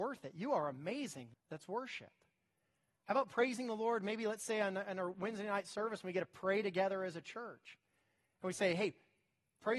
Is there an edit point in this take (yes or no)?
yes